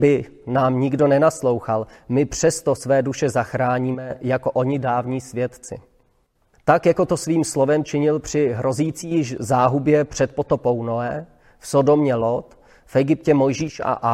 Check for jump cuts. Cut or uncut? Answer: cut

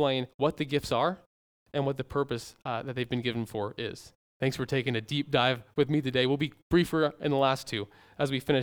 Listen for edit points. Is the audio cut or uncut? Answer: cut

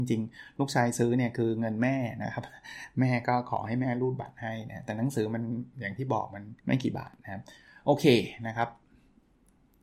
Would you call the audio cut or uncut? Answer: cut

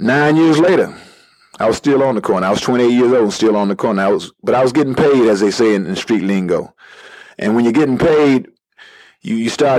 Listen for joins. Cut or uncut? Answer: uncut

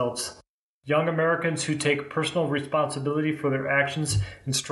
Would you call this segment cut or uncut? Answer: uncut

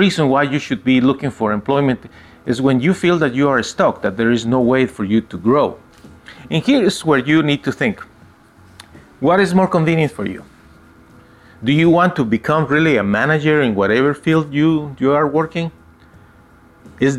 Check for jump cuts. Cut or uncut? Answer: uncut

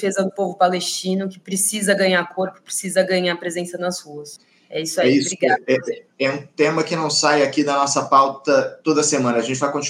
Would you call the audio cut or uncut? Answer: uncut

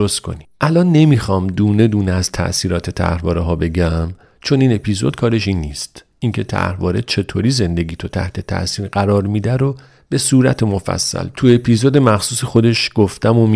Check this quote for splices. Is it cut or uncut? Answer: uncut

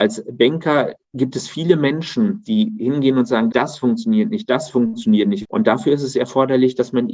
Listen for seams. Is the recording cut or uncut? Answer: cut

